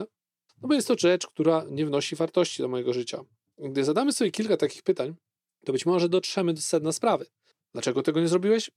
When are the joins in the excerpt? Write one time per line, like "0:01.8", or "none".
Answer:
none